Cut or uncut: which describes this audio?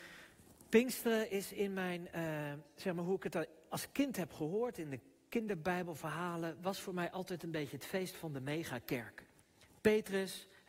uncut